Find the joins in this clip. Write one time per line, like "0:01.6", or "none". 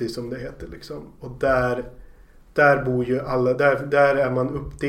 none